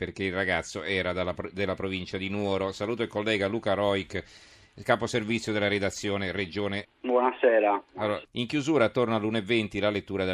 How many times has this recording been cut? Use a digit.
2